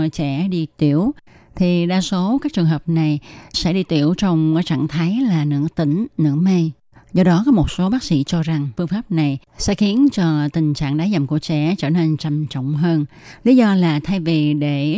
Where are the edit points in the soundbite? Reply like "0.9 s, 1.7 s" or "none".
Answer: 3.5 s